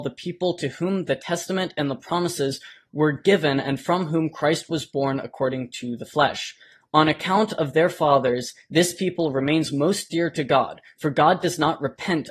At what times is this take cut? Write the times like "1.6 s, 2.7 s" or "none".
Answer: none